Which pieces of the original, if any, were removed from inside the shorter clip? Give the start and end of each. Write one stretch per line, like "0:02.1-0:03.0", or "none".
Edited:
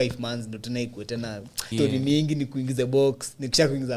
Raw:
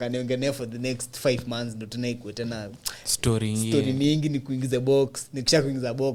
0:03.0-0:03.7